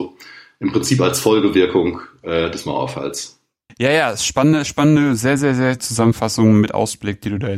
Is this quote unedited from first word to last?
no; 2 cuts; at 3.7 s, 5.8 s

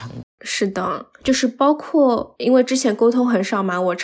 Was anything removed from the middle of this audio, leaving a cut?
no; 0 cuts

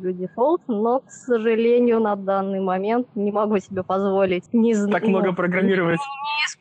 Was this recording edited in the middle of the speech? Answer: no; 0 cuts

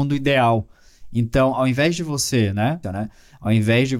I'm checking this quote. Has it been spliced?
yes; 1 cut; at 2.8 s

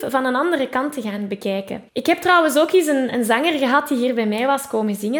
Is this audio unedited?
no; 1 cut; at 1.9 s

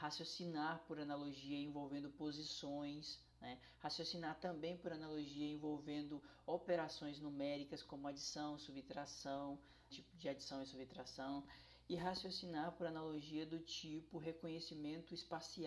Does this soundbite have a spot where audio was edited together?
yes; 1 cut; at 9.9 s

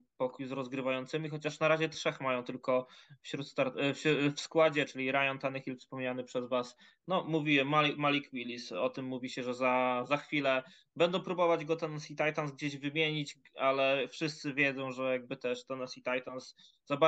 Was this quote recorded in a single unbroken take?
yes; 0 cuts

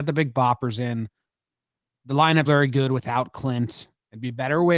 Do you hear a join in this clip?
yes; 1 cut; at 2.5 s

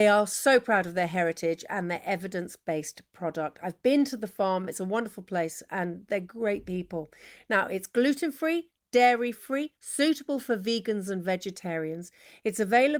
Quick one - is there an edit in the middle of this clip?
no; 0 cuts

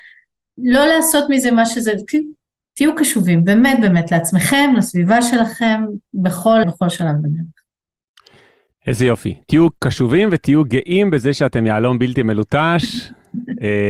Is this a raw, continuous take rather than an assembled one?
no; 1 cut; at 6.6 s

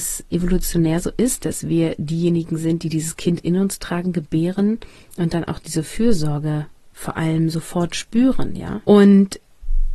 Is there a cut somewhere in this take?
yes; 1 cut; at 8.9 s

